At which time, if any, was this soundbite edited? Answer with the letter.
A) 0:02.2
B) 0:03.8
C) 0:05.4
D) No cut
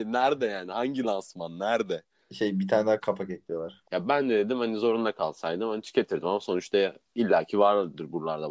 B